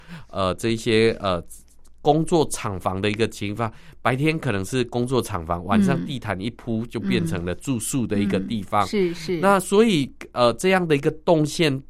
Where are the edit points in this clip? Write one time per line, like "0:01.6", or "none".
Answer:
none